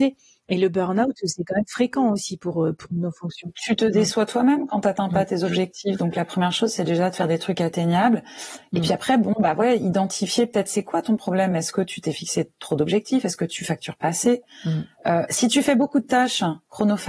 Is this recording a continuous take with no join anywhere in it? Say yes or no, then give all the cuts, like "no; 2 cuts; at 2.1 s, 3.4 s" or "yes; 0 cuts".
yes; 0 cuts